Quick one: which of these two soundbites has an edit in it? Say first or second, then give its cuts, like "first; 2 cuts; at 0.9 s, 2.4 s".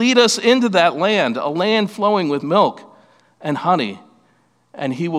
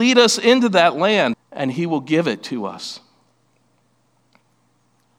second; 1 cut; at 1.3 s